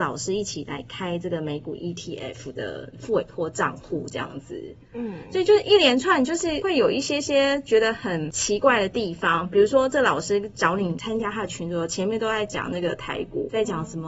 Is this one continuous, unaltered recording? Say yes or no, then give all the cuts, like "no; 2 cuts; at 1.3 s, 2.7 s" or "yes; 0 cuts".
yes; 0 cuts